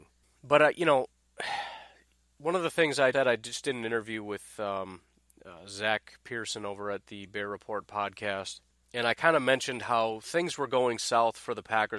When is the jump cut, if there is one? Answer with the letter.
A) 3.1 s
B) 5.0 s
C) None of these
A